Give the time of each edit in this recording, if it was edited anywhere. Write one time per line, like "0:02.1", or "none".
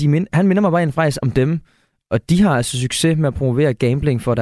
none